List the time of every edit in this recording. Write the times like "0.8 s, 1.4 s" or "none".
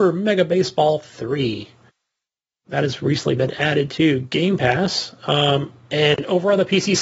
none